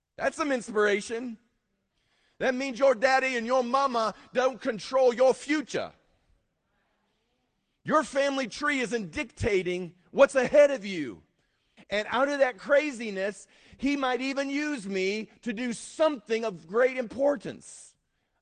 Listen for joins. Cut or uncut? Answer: cut